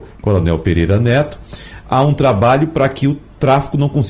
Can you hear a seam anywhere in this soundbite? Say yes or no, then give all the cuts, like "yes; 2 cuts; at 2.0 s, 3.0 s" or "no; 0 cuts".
no; 0 cuts